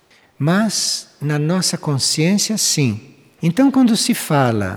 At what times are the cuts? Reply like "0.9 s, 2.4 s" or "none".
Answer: 3.4 s